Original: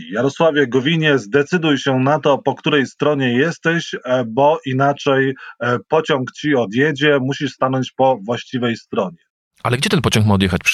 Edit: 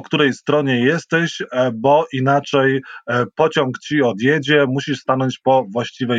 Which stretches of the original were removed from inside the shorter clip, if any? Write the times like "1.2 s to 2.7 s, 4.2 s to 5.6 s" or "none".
none